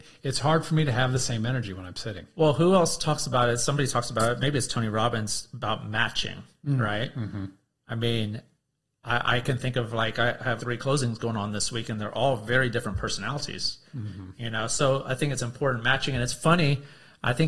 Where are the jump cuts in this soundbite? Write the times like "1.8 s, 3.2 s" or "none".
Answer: 10.6 s, 13.9 s